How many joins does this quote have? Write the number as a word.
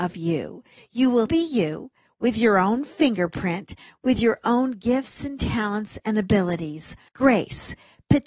two